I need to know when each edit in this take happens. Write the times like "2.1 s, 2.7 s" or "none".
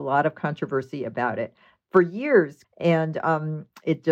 2.6 s